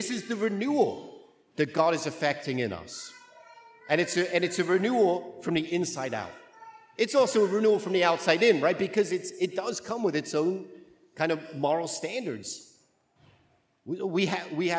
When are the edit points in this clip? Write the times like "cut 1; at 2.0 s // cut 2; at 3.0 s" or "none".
none